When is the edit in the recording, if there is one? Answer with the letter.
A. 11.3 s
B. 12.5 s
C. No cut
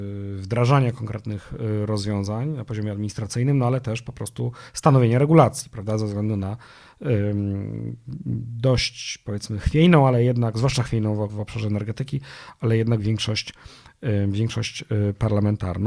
A